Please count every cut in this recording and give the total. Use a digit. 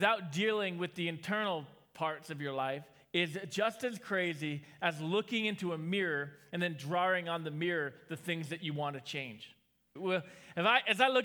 1